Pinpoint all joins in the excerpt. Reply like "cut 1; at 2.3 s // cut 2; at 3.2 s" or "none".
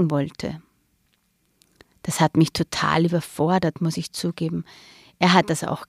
none